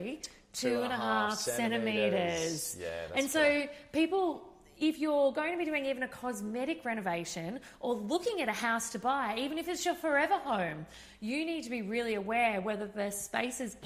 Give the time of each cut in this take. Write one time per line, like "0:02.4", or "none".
none